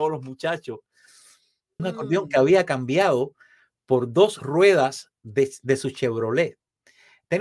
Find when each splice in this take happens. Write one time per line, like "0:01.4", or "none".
0:01.8